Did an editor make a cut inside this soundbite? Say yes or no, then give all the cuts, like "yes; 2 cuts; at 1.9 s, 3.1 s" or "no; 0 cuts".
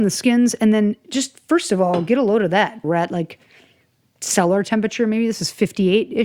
yes; 1 cut; at 2.8 s